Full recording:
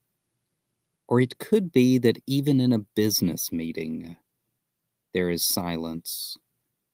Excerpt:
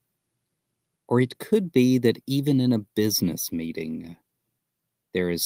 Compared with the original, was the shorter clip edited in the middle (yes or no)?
no